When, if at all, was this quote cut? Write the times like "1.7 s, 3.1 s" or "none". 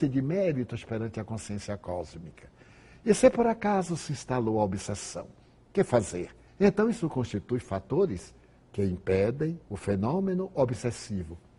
6.5 s, 9.6 s